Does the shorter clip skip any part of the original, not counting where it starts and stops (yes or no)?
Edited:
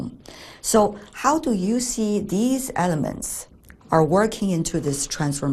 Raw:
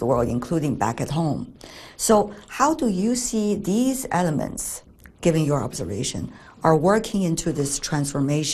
yes